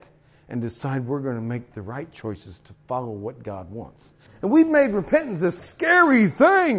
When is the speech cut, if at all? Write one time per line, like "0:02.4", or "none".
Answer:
0:04.3
0:05.6